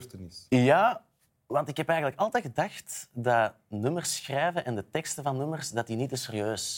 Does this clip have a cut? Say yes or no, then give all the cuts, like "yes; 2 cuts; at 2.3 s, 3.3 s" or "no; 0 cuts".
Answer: no; 0 cuts